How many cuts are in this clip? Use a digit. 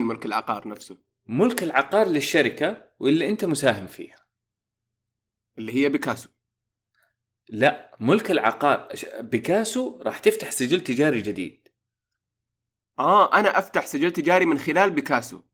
0